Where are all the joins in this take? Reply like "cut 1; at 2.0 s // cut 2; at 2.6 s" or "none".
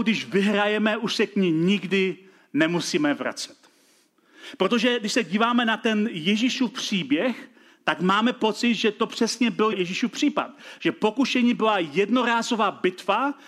cut 1; at 9.7 s